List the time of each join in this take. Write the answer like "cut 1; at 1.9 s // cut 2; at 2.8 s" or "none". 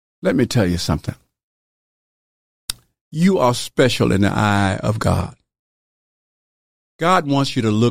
none